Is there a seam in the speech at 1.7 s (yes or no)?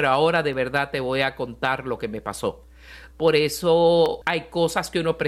no